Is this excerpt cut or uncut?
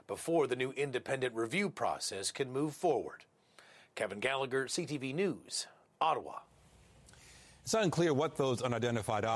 uncut